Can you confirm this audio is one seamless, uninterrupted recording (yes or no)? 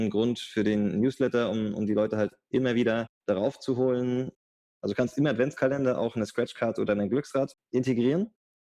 no